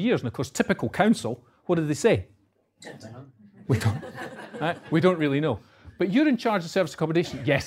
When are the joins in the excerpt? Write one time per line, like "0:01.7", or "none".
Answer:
none